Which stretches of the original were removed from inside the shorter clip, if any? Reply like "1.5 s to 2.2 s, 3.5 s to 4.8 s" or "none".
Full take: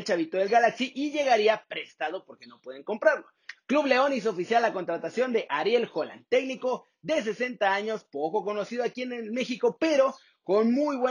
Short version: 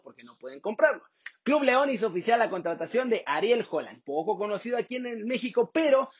6.3 s to 8.1 s